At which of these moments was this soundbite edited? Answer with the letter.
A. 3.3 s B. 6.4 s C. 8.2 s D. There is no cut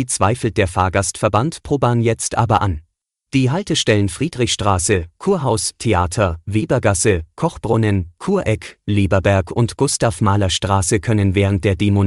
A